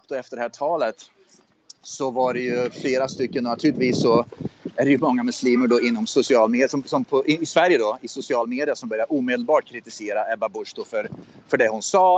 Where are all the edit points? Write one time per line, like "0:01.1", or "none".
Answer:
none